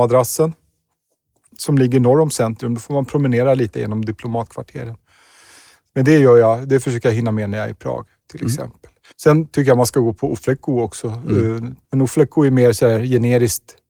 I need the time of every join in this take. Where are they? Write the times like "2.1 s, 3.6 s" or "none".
9.1 s, 11.8 s